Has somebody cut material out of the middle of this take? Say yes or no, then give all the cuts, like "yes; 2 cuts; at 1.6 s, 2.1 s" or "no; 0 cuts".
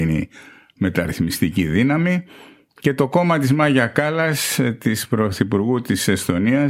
no; 0 cuts